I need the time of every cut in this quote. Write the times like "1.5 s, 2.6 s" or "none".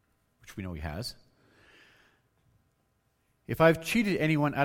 none